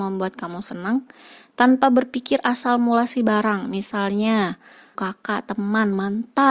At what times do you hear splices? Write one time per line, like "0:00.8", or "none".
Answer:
0:05.0